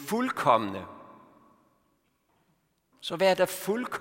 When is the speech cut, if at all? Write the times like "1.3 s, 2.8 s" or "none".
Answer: 2.9 s